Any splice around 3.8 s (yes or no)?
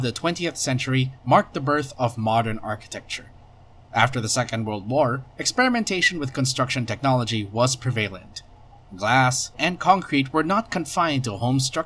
no